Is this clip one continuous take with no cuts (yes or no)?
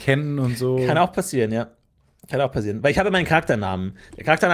yes